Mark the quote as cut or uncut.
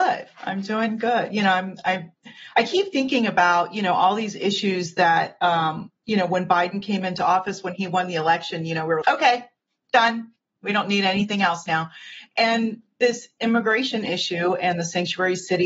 cut